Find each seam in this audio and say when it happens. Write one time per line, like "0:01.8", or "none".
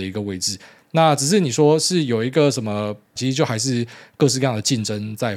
0:03.2